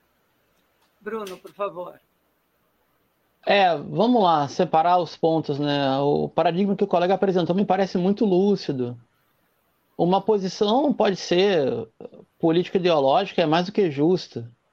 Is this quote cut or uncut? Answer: uncut